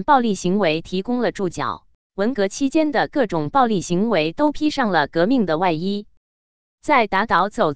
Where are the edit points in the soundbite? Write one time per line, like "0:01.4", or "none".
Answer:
0:02.1